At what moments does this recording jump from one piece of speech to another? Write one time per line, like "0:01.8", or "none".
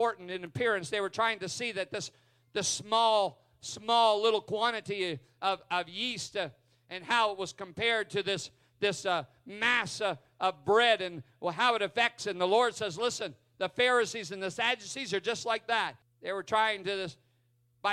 0:16.0